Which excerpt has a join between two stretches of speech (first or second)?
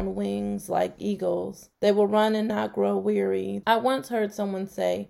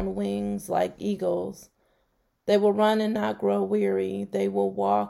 first